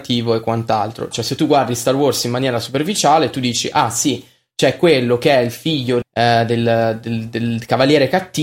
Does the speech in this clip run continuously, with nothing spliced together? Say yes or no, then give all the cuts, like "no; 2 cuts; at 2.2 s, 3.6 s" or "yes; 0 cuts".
no; 2 cuts; at 1.1 s, 6.0 s